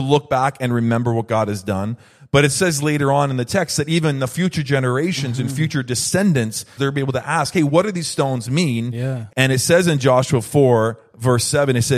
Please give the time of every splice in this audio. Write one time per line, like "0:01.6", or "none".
0:06.8
0:09.3